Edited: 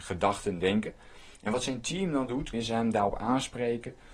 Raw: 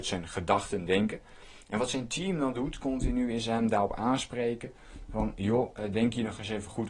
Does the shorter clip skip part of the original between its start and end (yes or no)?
yes